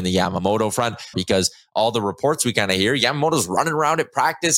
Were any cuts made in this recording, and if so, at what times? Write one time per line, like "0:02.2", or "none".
0:01.1

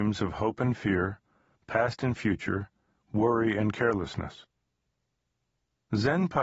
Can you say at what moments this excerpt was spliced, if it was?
none

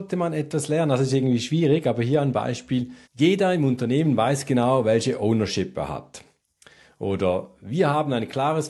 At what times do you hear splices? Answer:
0:03.0

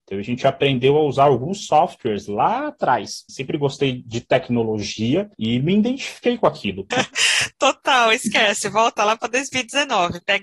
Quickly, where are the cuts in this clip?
0:03.3
0:06.9

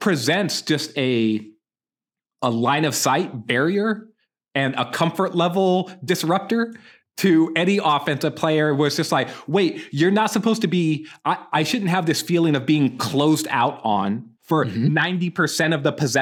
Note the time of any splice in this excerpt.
none

